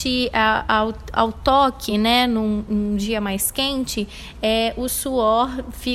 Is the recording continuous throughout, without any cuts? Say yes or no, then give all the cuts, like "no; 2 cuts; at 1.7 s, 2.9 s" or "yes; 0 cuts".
yes; 0 cuts